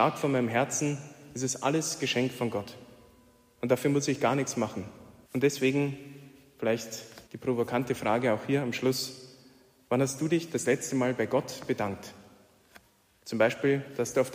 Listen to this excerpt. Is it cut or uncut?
cut